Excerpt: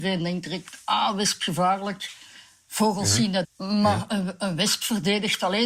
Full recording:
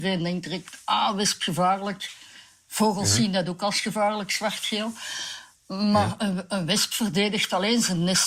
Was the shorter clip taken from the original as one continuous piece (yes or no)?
no